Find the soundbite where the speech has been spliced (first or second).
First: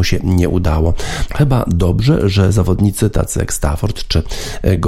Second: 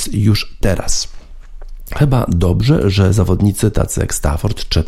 first